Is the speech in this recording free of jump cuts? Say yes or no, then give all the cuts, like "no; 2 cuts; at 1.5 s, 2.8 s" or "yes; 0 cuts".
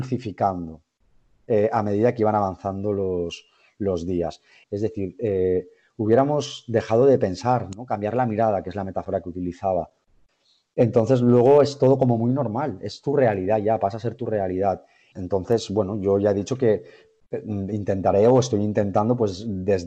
no; 2 cuts; at 4.6 s, 15.1 s